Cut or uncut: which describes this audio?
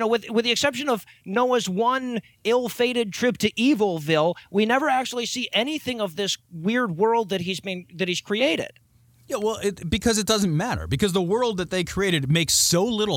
uncut